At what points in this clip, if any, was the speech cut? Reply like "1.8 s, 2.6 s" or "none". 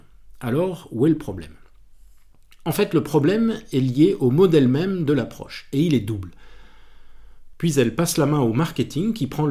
7.5 s